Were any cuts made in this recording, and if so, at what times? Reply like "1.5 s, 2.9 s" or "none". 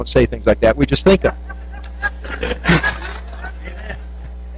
none